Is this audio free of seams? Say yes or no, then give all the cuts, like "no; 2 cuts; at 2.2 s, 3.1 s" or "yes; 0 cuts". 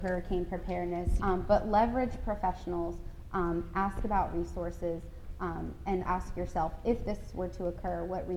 no; 2 cuts; at 1.2 s, 6.0 s